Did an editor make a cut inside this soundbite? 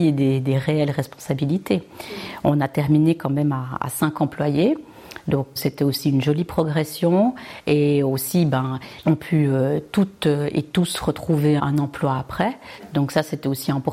yes; 3 cuts; at 5.6 s, 9.0 s, 11.6 s

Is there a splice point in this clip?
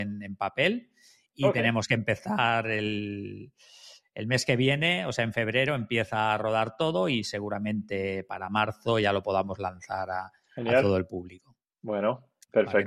no; 0 cuts

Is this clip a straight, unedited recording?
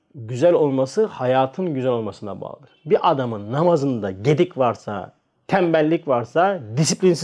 yes; 0 cuts

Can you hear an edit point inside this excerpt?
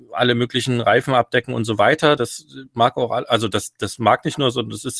no; 0 cuts

